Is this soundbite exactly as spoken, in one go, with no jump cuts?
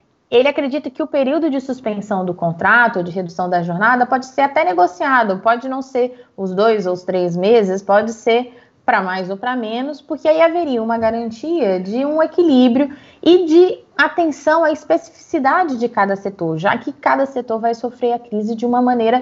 yes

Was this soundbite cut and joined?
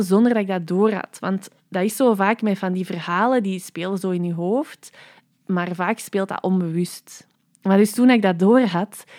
no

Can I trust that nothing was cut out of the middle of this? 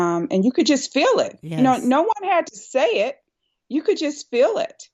yes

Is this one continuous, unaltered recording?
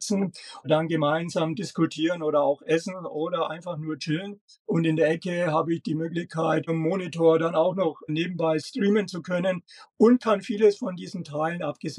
no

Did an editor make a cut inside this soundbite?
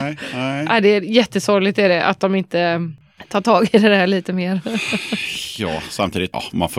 no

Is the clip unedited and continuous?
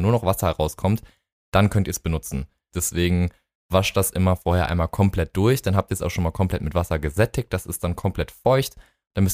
no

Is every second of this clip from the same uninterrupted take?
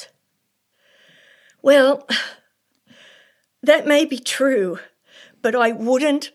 yes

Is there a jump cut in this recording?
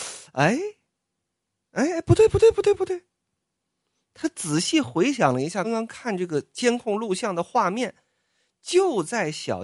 yes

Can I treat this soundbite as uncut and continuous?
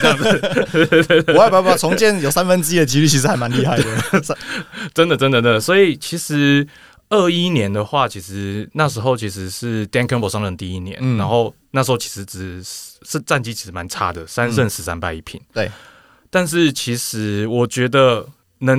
yes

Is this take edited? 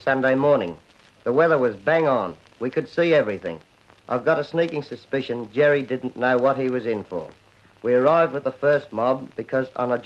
no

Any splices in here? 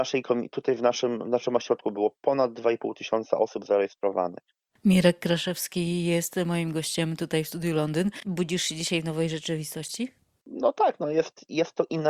no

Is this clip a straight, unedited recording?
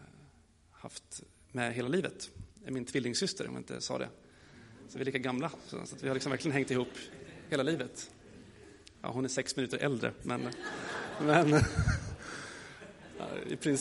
yes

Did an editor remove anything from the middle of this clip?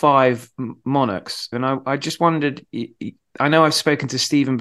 yes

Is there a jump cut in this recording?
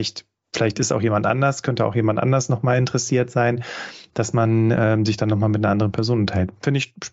no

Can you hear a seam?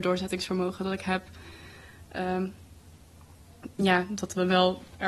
no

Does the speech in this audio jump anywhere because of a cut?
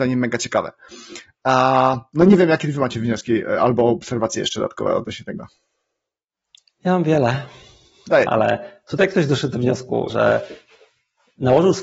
yes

